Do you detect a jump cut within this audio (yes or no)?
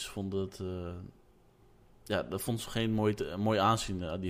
no